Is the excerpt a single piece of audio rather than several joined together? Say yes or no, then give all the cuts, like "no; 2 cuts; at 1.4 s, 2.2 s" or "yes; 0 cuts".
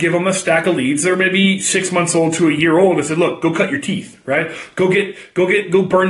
yes; 0 cuts